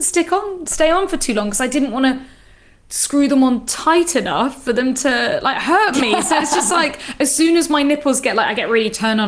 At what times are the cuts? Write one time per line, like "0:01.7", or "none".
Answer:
none